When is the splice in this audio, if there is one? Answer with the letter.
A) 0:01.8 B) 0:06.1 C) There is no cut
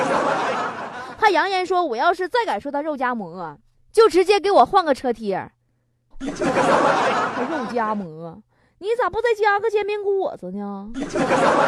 B